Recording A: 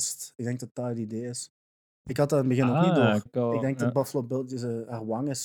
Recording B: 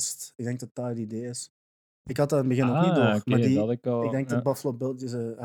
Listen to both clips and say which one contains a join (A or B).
A